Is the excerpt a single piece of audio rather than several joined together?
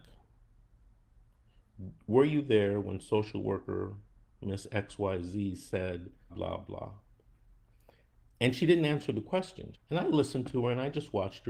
no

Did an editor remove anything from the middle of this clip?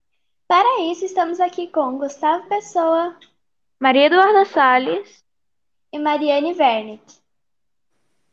no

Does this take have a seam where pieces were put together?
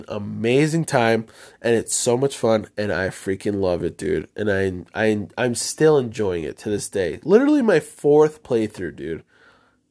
no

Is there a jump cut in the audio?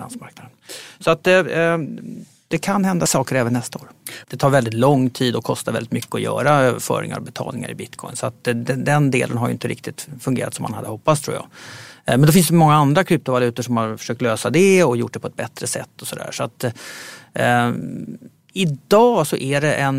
yes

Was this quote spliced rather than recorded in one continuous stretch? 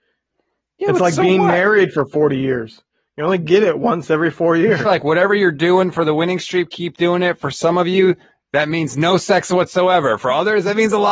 yes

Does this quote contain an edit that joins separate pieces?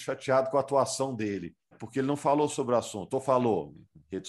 yes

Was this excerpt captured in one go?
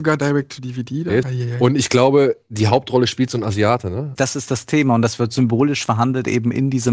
no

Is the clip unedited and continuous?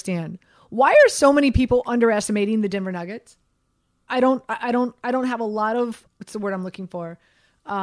no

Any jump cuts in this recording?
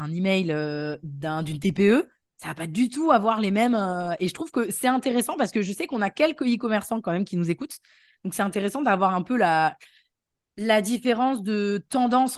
no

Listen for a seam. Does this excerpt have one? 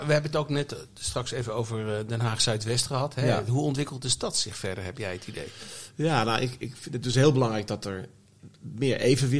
yes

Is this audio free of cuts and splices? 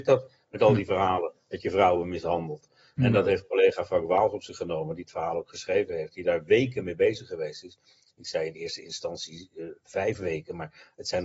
yes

